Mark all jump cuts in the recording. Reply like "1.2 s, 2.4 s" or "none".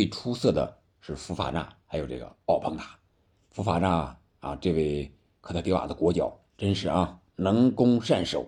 6.5 s